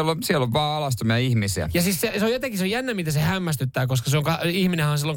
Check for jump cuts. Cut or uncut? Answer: uncut